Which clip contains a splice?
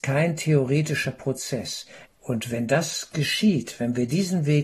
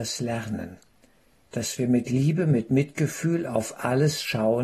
first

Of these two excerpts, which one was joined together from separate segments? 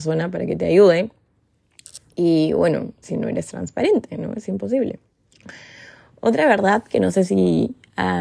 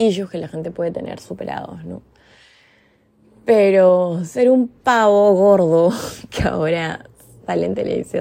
first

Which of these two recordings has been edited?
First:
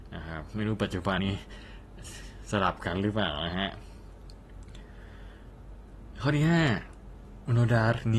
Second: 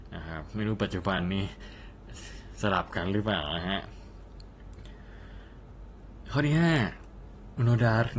first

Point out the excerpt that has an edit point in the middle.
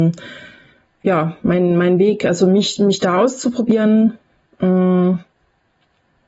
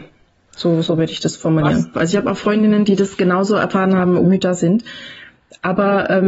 second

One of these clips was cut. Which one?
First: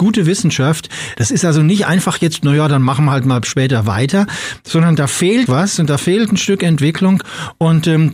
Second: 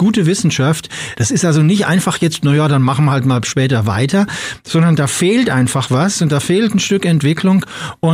first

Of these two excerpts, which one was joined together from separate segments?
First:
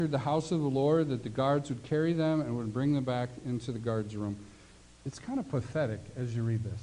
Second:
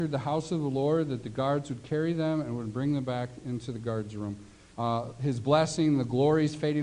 second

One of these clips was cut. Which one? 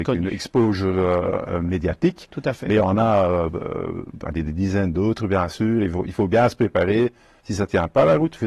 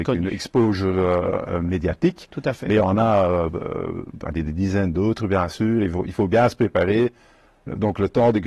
first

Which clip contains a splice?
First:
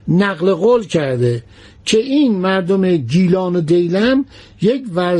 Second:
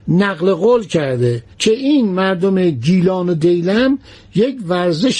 second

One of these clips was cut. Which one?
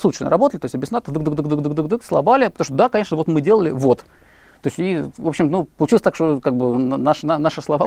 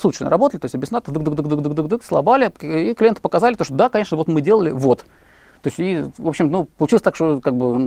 first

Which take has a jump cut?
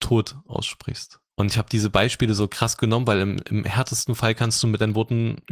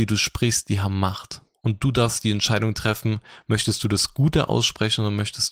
first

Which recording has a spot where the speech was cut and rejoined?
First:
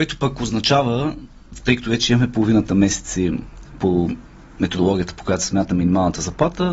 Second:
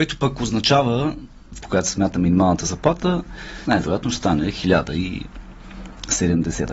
second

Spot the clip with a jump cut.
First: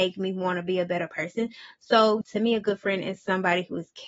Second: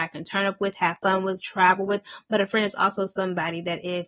first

